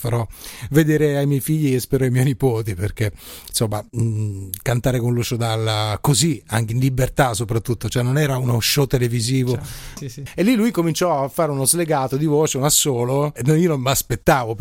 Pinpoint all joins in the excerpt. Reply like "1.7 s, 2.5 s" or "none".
10.0 s, 13.4 s